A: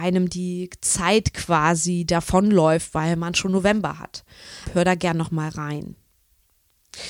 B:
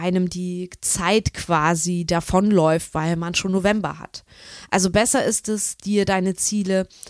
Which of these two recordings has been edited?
A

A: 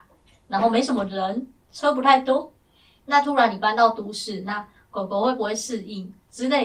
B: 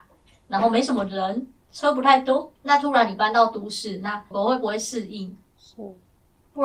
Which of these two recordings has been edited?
B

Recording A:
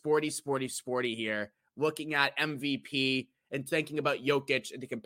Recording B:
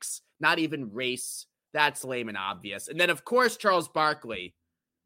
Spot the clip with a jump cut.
B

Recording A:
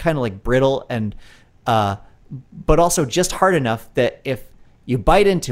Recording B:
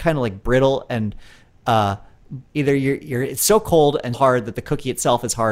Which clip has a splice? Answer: B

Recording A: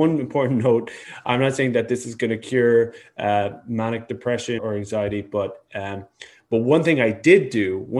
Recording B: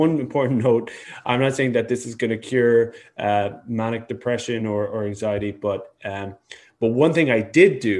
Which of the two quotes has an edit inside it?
A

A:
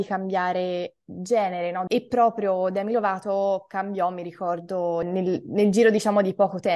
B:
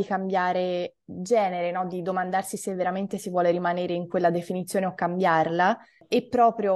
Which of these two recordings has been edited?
A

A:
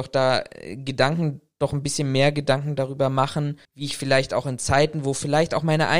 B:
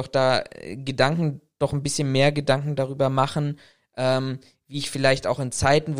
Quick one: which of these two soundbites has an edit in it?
A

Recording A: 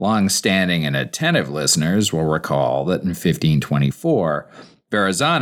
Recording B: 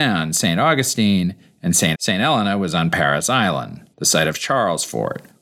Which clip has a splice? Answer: B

